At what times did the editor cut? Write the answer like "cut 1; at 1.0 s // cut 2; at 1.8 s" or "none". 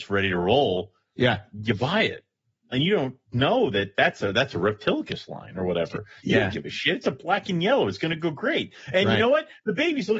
cut 1; at 2.7 s